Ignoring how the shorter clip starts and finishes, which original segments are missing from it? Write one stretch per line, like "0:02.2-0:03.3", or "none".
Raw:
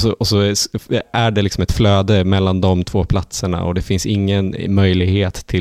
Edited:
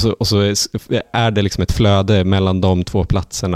none